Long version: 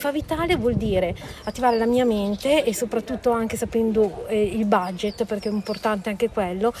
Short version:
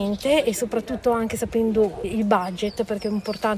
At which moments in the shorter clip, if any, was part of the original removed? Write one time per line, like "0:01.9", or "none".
0:02.0